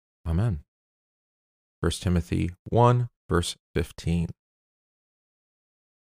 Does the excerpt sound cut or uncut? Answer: cut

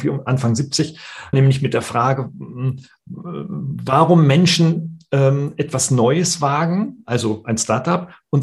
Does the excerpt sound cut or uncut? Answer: cut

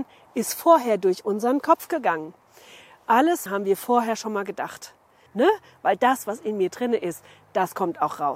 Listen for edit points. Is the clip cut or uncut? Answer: cut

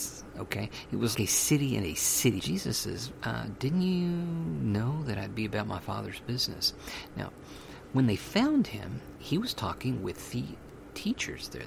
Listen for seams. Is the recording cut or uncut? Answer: cut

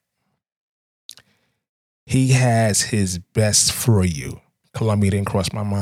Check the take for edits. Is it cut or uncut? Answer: cut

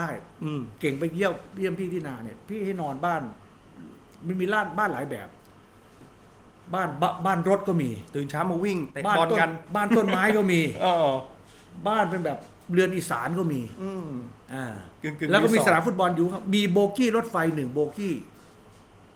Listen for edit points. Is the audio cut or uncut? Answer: cut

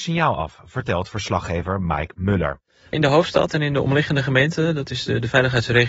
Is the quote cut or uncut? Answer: uncut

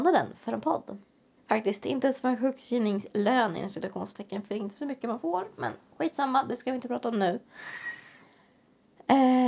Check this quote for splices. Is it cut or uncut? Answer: cut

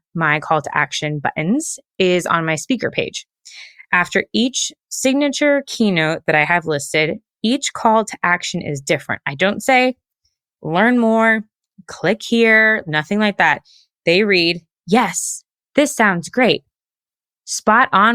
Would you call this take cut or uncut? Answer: uncut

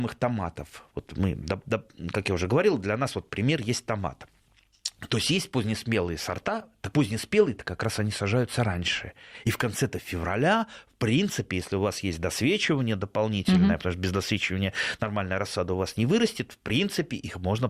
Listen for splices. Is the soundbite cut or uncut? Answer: cut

